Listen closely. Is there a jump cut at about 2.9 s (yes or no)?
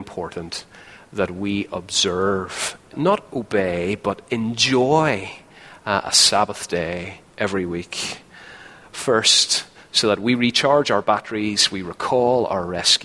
yes